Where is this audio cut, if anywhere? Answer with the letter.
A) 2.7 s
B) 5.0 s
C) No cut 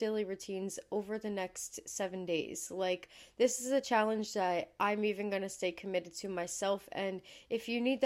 C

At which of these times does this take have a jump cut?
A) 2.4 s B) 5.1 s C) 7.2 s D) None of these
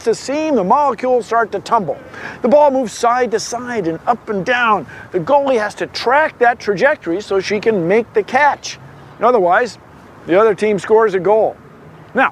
A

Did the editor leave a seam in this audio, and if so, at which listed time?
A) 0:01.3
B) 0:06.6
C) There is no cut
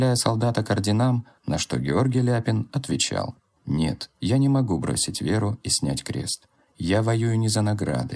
A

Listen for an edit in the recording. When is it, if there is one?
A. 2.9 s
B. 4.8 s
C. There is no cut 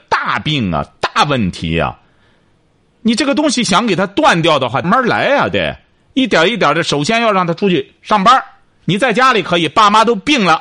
B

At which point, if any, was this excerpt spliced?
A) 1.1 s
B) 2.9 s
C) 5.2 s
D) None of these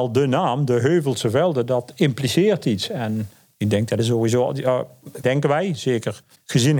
C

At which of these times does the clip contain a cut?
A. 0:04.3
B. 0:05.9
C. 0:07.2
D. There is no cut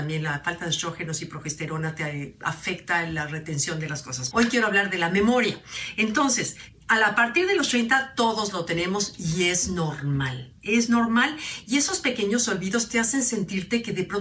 A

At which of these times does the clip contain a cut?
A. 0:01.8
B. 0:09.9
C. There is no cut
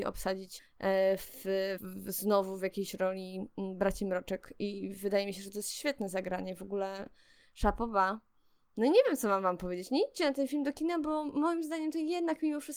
A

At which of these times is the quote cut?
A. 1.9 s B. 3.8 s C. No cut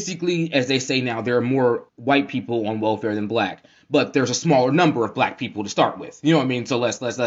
A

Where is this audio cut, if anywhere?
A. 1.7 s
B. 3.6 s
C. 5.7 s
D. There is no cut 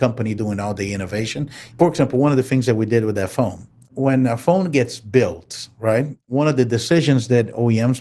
A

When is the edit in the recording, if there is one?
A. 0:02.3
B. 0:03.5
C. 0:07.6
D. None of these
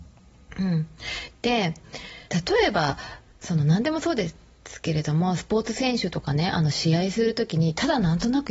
A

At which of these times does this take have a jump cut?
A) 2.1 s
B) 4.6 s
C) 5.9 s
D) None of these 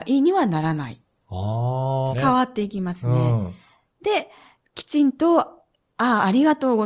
A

